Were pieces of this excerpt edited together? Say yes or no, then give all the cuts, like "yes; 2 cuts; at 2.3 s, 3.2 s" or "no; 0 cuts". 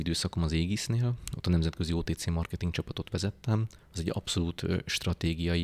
yes; 1 cut; at 3.8 s